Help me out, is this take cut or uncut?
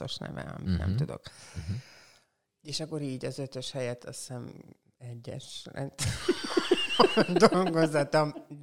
cut